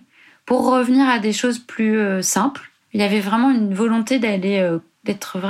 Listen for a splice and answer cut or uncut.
cut